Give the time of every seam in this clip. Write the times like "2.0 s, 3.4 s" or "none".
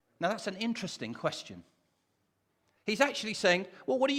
2.8 s